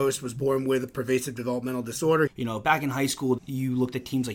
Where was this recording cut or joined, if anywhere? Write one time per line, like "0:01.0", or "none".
0:02.3
0:03.4